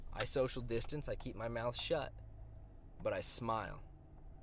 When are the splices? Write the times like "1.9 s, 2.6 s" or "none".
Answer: 1.0 s